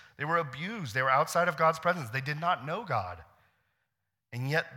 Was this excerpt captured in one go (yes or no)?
yes